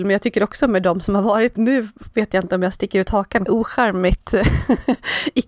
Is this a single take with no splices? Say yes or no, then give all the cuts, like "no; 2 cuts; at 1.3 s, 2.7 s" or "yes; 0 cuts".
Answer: no; 2 cuts; at 1.6 s, 3.5 s